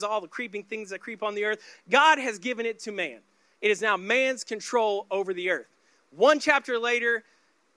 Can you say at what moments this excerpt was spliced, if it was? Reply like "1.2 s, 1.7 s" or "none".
none